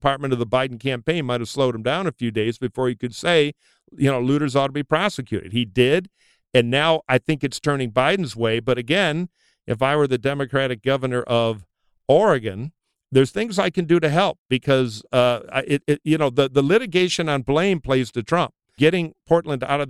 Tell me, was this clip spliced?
no; 0 cuts

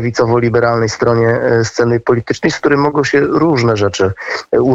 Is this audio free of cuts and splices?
yes; 0 cuts

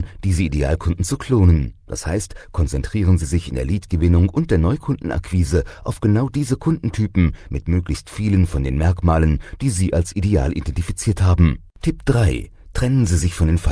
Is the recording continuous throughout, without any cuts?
no; 1 cut; at 11.7 s

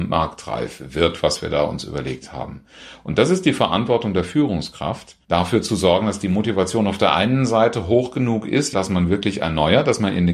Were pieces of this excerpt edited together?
yes; 2 cuts; at 5.2 s, 8.7 s

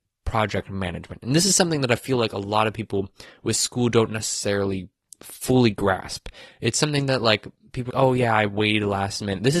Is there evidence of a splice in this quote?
yes; 1 cut; at 7.9 s

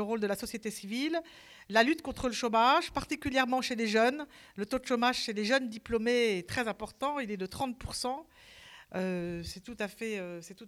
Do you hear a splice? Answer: no; 0 cuts

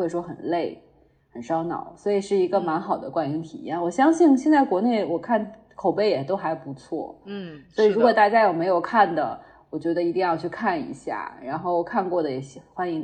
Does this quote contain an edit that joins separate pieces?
no; 0 cuts

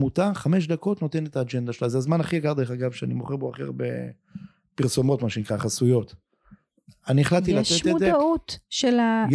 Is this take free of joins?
yes; 0 cuts

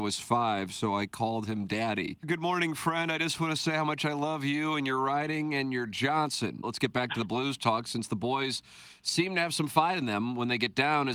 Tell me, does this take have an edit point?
yes; 2 cuts; at 2.2 s, 6.6 s

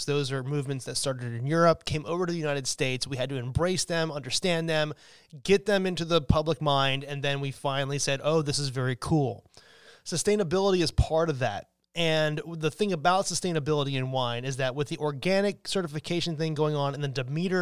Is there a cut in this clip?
no; 0 cuts

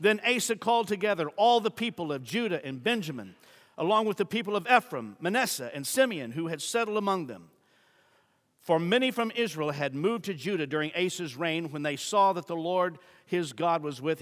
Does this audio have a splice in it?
no; 0 cuts

